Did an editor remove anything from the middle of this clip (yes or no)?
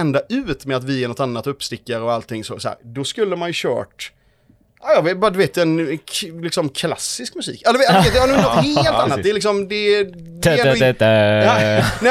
no